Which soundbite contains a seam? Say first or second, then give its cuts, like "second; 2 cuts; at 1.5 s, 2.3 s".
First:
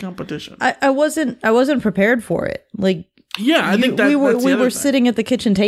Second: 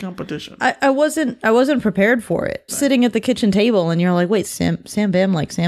second; 2 cuts; at 2.7 s, 4.4 s